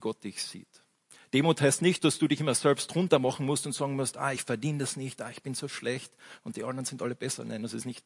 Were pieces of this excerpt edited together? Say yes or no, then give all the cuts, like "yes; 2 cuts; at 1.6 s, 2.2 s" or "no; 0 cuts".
no; 0 cuts